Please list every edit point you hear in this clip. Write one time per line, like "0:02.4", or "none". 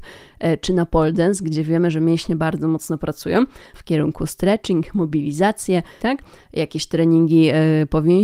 0:03.7
0:06.0